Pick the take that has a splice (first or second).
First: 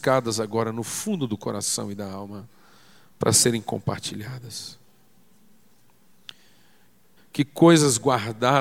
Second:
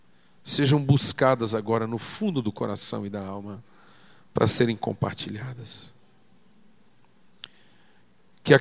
first